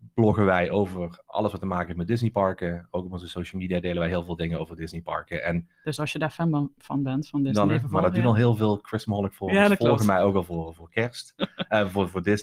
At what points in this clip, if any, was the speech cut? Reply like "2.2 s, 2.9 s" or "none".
7.7 s